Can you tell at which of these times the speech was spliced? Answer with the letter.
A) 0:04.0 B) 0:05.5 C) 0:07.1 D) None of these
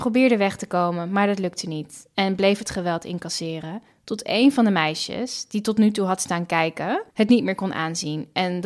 C